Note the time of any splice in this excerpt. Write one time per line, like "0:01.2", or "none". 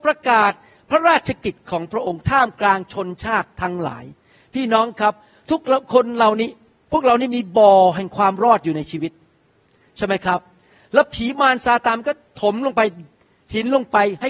none